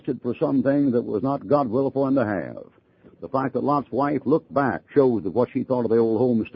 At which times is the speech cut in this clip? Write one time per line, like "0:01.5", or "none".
0:03.0
0:04.9